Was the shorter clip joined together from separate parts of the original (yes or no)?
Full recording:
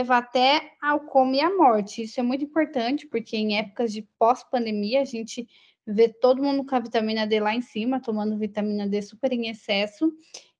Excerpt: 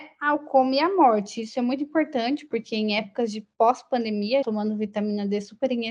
yes